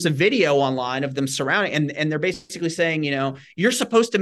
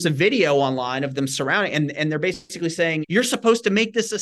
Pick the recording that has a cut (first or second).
second